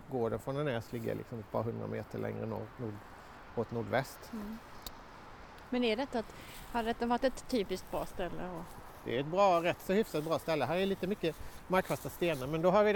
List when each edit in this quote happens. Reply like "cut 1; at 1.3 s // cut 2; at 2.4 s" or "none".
none